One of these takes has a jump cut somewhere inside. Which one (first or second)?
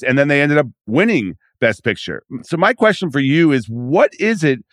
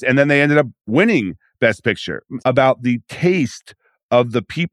second